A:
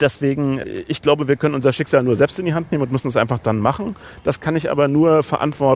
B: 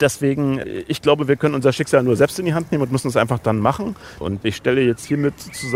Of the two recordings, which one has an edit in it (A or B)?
B